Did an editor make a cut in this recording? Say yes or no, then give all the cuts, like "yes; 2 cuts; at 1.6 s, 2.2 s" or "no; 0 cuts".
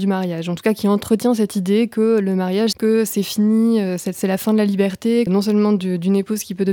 yes; 2 cuts; at 2.7 s, 5.3 s